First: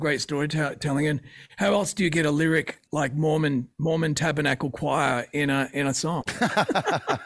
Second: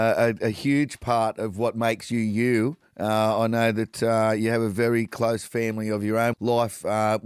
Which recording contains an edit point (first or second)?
second